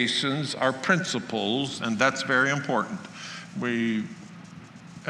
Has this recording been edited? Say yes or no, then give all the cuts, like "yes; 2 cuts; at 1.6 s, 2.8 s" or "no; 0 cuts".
yes; 2 cuts; at 1.8 s, 3.5 s